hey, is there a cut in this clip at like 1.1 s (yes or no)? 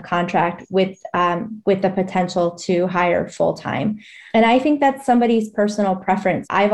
no